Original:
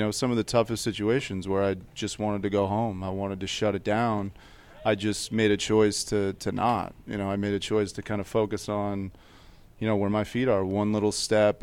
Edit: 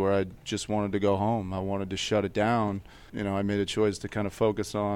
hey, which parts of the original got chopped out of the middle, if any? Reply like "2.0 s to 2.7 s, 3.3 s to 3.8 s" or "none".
4.6 s to 7.0 s